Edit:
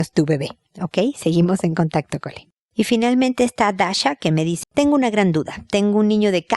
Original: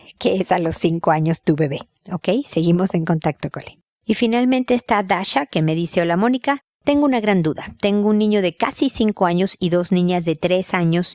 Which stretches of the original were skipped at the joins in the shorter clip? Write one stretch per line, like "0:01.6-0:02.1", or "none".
0:05.9-0:06.7